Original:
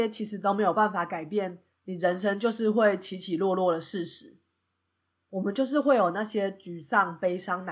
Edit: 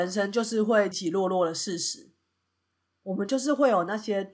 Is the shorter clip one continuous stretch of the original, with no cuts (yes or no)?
no